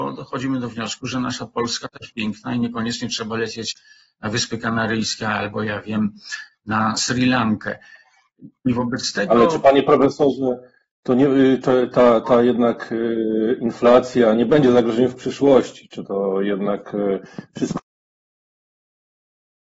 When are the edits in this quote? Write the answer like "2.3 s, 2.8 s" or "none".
none